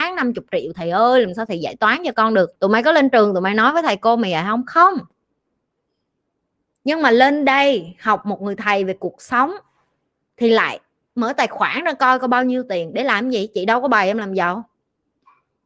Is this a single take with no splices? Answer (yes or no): no